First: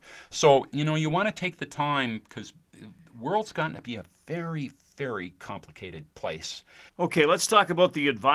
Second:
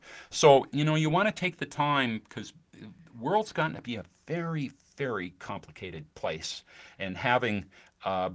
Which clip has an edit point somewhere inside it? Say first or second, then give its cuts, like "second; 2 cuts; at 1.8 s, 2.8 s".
first; 1 cut; at 6.9 s